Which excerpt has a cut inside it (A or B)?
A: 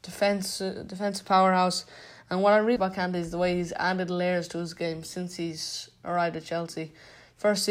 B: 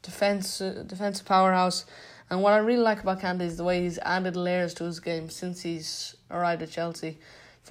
A